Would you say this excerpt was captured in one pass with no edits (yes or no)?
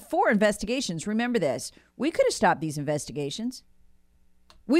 yes